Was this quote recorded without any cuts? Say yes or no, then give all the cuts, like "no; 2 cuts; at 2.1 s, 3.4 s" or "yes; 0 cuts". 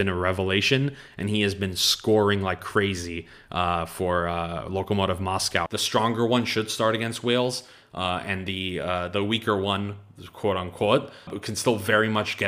no; 2 cuts; at 5.7 s, 11.3 s